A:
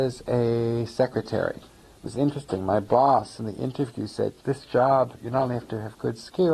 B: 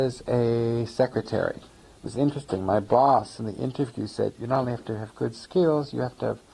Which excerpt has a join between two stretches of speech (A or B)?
B